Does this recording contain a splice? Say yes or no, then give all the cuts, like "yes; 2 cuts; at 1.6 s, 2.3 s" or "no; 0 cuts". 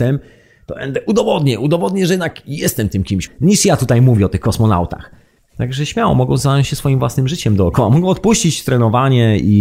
yes; 2 cuts; at 3.3 s, 5.4 s